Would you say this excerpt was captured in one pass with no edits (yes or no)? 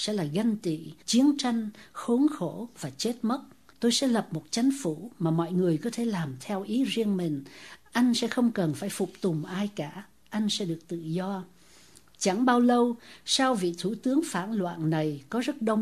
no